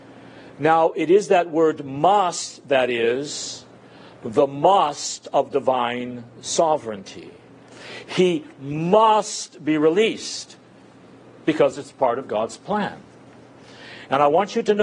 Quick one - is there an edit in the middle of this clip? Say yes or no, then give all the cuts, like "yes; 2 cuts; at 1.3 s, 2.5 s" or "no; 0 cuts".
no; 0 cuts